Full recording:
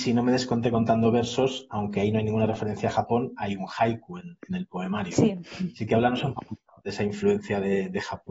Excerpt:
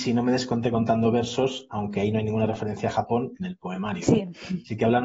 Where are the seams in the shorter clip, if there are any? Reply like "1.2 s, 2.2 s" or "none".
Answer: 3.4 s